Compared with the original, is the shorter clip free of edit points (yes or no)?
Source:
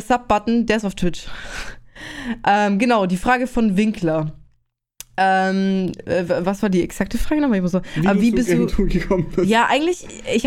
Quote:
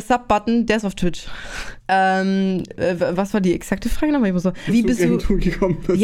no